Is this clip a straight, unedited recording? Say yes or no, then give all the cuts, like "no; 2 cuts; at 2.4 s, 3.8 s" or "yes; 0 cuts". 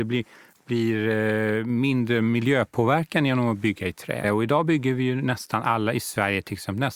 no; 1 cut; at 4.2 s